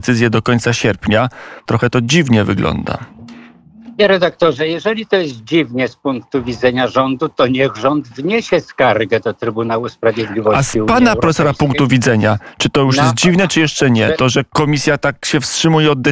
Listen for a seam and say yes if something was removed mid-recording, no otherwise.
yes